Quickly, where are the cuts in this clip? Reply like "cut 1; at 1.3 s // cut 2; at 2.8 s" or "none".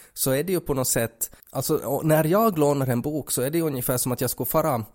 cut 1; at 1.4 s